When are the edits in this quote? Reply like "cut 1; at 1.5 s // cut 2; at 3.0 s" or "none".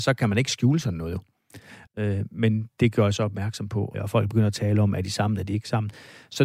cut 1; at 1.9 s // cut 2; at 3.9 s